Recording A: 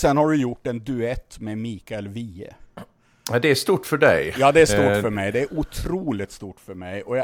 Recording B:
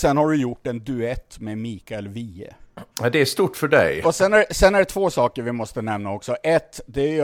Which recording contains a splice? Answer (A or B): B